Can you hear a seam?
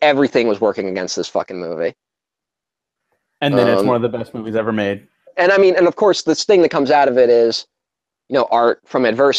yes; 1 cut; at 5.3 s

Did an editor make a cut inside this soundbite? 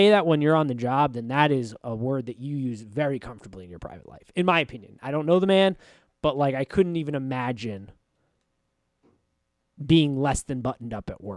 no; 0 cuts

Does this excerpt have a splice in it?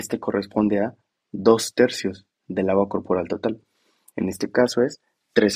yes; 1 cut; at 4.1 s

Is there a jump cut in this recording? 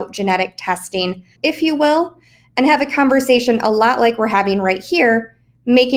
yes; 1 cut; at 1.4 s

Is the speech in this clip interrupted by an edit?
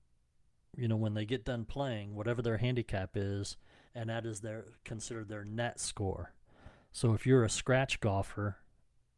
yes; 1 cut; at 3.9 s

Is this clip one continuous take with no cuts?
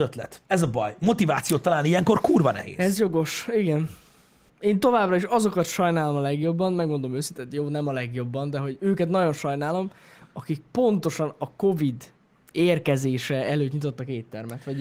no; 1 cut; at 4.5 s

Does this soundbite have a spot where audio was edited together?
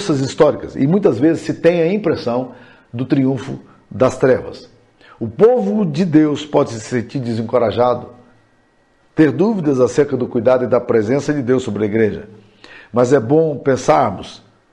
no; 0 cuts

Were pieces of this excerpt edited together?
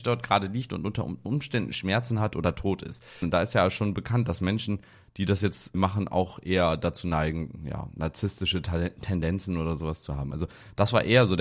yes; 2 cuts; at 3.2 s, 5.7 s

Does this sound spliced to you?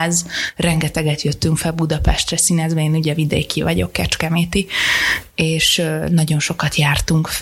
no; 0 cuts

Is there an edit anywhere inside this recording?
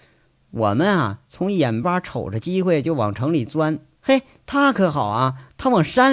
yes; 1 cut; at 1.8 s

